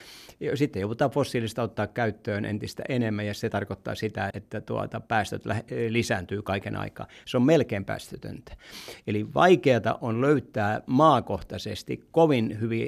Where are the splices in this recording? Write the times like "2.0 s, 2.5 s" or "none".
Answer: 4.3 s, 7.2 s, 9.0 s

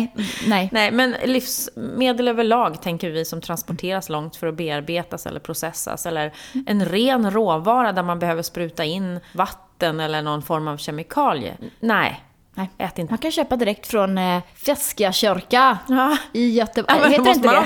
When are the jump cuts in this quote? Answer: 13.1 s

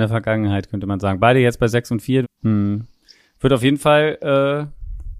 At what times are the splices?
2.2 s

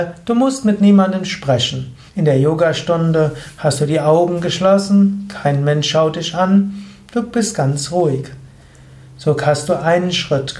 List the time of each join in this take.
2.1 s

